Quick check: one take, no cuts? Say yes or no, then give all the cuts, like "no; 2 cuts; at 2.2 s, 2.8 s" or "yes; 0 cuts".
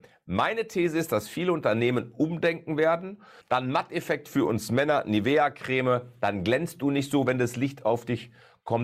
no; 1 cut; at 3.4 s